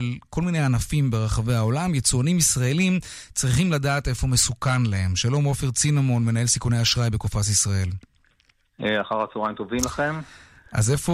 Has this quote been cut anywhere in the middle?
no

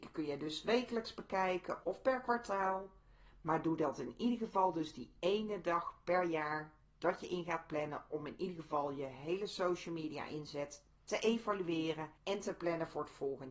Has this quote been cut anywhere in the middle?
yes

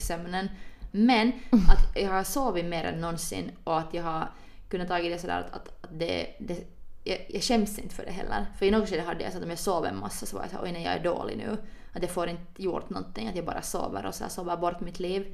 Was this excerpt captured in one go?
no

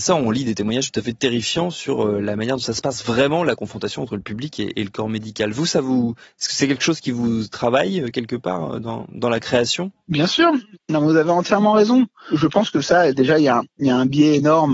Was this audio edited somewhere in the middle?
no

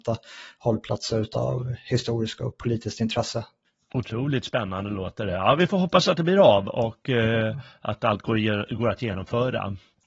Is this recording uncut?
yes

